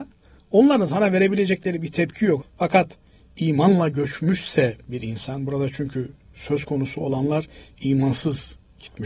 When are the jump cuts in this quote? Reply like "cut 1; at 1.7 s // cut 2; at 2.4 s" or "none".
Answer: cut 1; at 2.4 s